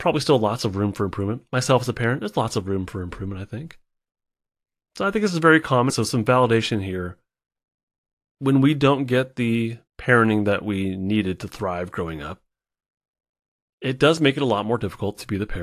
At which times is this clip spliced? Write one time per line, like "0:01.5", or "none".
0:05.9
0:09.9